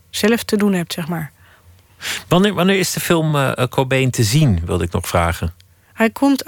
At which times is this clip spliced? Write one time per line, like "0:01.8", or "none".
none